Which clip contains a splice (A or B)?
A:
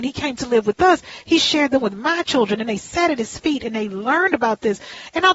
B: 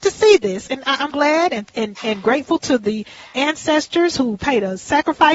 B